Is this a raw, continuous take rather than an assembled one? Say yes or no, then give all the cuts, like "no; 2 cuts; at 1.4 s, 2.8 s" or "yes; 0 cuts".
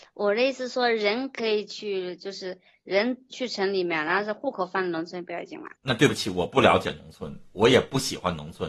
no; 1 cut; at 5.8 s